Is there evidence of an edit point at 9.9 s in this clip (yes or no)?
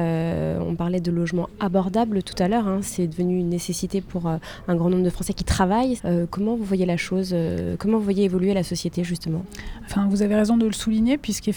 yes